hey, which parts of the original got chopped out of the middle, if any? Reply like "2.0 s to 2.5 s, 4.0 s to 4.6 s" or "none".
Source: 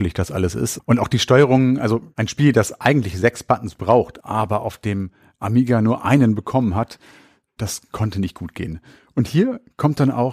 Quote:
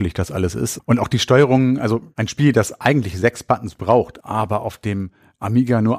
none